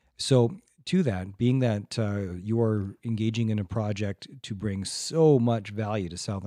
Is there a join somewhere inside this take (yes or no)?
no